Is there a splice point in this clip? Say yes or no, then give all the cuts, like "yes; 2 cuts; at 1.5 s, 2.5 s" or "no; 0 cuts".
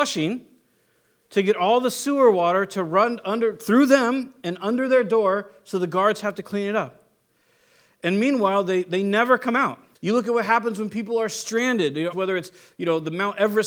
yes; 2 cuts; at 9.9 s, 12.1 s